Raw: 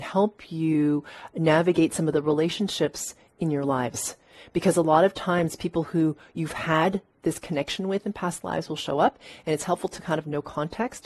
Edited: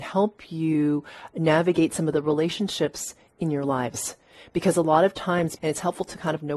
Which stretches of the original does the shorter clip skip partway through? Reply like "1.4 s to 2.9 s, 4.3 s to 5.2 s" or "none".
5.6 s to 9.4 s